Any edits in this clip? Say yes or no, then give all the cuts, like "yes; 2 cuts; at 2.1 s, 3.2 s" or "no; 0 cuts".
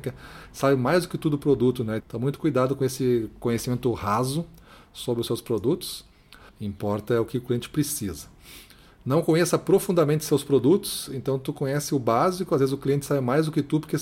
yes; 2 cuts; at 2.0 s, 6.5 s